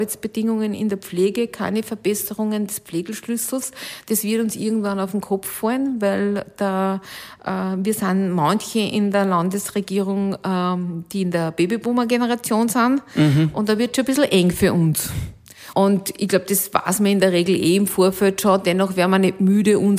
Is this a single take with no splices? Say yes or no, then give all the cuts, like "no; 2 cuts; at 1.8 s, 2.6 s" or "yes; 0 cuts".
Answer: no; 1 cut; at 15.7 s